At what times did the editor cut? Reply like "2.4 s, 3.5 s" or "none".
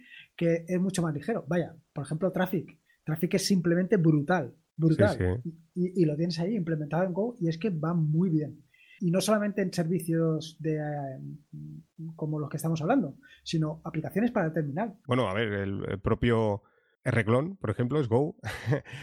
9.0 s, 15.1 s, 16.9 s